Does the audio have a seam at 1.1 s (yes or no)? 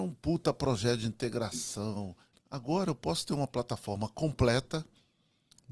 no